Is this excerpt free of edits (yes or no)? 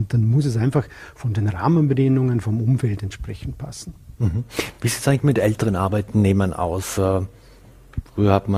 yes